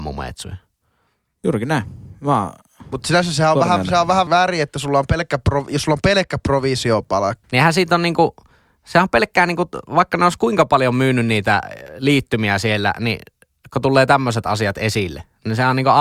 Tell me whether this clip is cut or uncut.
cut